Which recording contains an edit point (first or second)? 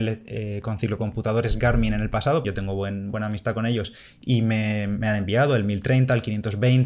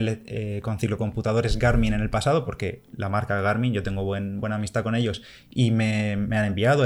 first